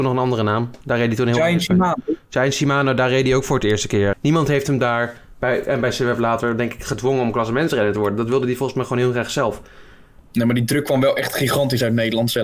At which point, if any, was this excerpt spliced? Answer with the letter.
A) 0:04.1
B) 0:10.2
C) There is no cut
A